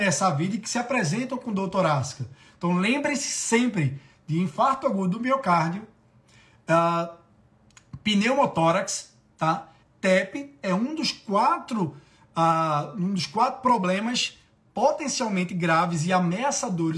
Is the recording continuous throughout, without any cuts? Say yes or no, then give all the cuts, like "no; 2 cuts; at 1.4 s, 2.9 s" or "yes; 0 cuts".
no; 1 cut; at 9.8 s